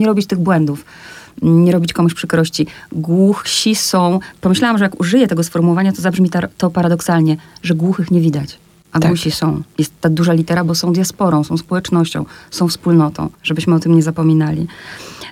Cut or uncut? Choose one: cut